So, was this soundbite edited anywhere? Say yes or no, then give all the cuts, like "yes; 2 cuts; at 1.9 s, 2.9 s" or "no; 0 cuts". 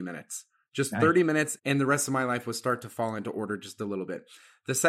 yes; 1 cut; at 1.6 s